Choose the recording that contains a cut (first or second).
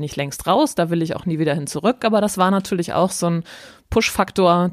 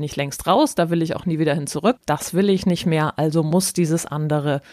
second